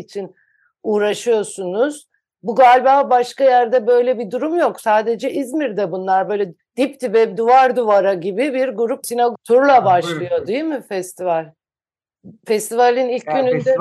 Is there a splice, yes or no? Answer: yes